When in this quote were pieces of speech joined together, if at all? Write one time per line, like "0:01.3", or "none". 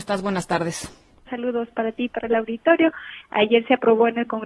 0:01.3
0:03.2